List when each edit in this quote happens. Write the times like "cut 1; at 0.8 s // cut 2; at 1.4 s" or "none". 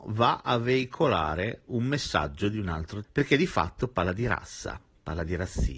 cut 1; at 3.0 s